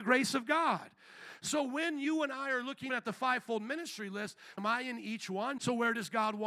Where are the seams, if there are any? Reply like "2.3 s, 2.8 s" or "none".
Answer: 2.9 s, 4.6 s, 5.6 s